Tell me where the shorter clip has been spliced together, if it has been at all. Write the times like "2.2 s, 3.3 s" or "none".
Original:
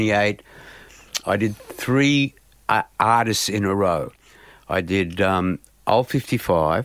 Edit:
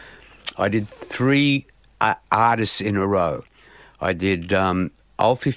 none